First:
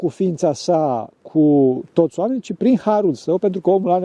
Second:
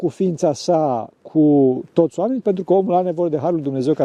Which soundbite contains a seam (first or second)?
second